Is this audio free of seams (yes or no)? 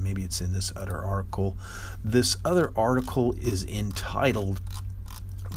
yes